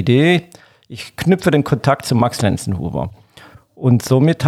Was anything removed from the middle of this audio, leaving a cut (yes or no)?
no